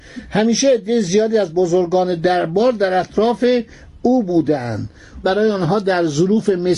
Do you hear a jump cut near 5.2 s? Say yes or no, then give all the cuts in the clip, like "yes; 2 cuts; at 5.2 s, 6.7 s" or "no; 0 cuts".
yes; 1 cut; at 5.2 s